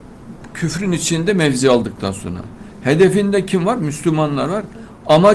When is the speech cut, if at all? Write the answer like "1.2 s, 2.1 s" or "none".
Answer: none